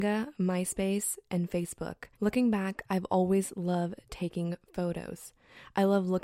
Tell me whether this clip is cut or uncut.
cut